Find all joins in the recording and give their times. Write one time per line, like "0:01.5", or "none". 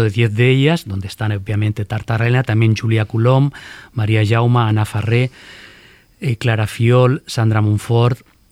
none